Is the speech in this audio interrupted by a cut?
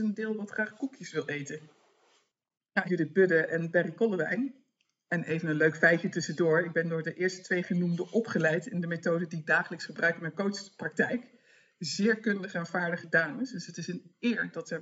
yes; 1 cut; at 2.8 s

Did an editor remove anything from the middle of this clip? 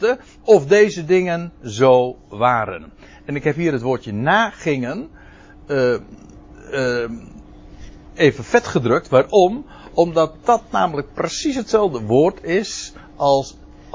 no; 0 cuts

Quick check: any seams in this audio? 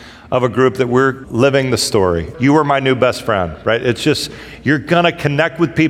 yes; 2 cuts; at 1.2 s, 2.3 s

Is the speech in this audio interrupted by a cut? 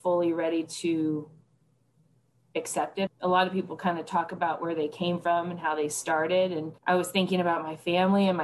yes; 2 cuts; at 3.1 s, 6.8 s

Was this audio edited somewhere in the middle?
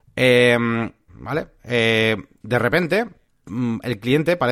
yes; 2 cuts; at 1.1 s, 2.4 s

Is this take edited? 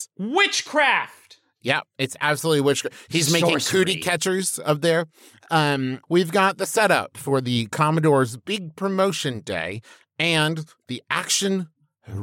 yes; 1 cut; at 6.0 s

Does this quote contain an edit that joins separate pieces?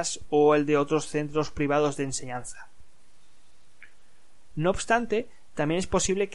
yes; 1 cut; at 4.5 s

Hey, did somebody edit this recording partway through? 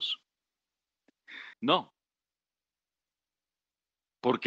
yes; 1 cut; at 1.5 s

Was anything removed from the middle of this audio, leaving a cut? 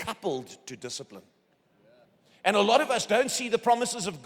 no; 0 cuts

